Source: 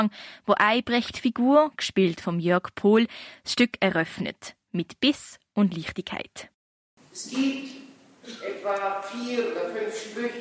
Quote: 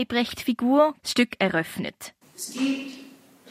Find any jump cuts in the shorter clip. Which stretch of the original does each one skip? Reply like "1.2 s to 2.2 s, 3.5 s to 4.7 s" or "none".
1.8 s to 3.4 s, 4.6 s to 7.0 s